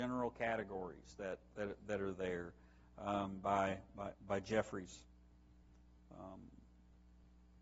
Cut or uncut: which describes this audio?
uncut